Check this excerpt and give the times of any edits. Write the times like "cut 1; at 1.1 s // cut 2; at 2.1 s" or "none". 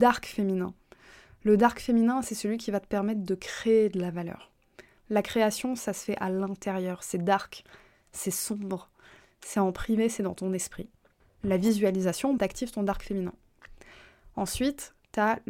cut 1; at 5.0 s // cut 2; at 11.2 s // cut 3; at 12.4 s